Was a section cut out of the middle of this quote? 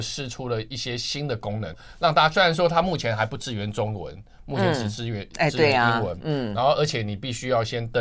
yes; 1 cut; at 1.7 s

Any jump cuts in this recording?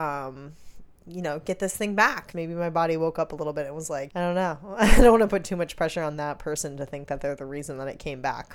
yes; 2 cuts; at 2.3 s, 4.1 s

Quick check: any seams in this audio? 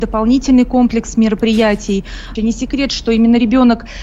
yes; 1 cut; at 2.4 s

